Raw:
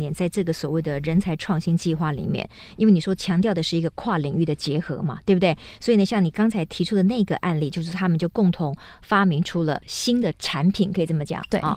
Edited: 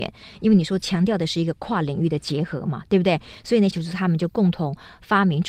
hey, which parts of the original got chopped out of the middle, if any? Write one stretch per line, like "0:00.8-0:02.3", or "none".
0:06.1-0:07.7